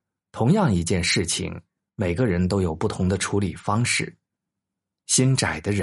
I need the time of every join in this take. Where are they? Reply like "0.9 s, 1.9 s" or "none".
none